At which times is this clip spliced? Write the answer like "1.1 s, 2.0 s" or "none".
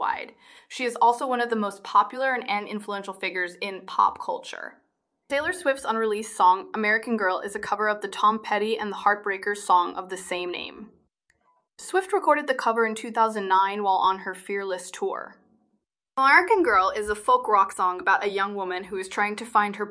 16.1 s

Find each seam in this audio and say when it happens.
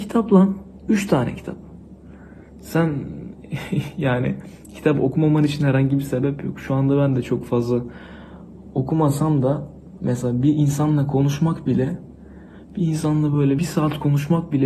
13.6 s

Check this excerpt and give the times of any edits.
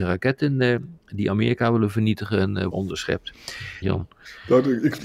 2.7 s, 3.8 s

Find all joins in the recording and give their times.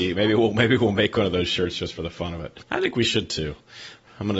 2.7 s

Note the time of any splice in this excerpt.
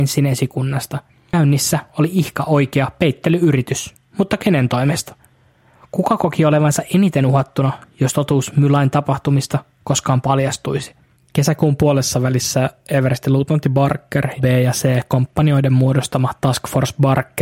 14.4 s

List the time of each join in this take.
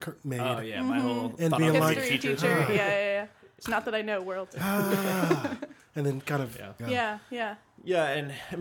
3.7 s, 6.8 s

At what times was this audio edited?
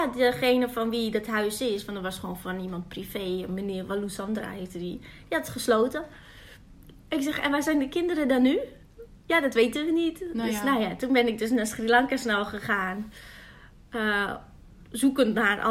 none

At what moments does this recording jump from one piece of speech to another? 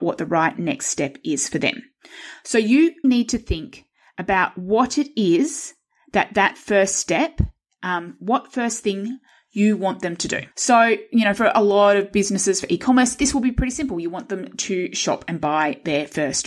3.0 s, 10.5 s

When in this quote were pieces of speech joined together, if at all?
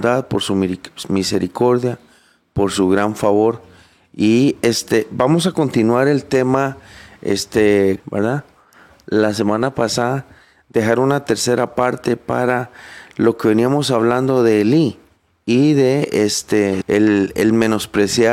8.0 s, 16.8 s

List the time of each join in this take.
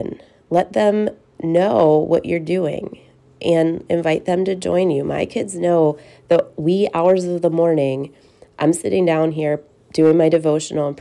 none

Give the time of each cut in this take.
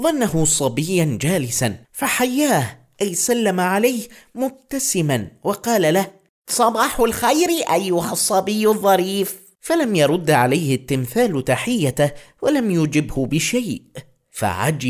1.8 s

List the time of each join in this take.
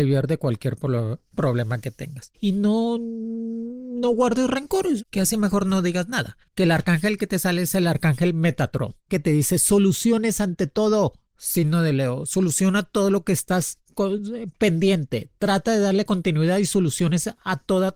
5.0 s

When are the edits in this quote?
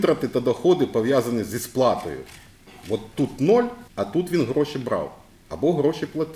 3.9 s

